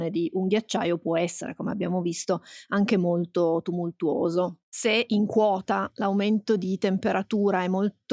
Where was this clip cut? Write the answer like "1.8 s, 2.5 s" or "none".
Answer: none